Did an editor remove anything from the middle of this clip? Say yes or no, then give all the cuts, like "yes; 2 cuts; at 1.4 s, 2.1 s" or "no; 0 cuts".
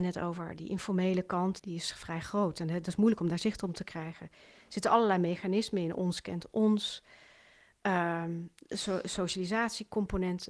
yes; 1 cut; at 1.6 s